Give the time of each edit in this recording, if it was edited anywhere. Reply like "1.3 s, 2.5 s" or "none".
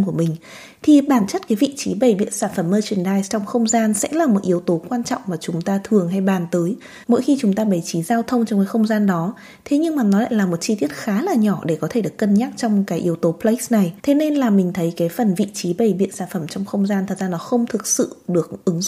7.0 s, 14.0 s